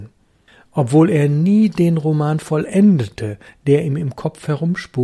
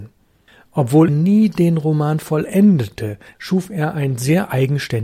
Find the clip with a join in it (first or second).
second